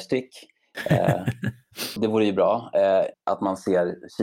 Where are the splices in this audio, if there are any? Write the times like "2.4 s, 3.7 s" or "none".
2.0 s, 3.1 s